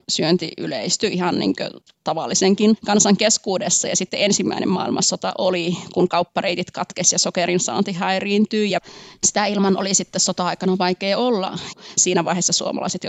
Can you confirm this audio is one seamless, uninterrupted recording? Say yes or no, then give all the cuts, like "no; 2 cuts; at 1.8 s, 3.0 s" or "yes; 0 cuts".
yes; 0 cuts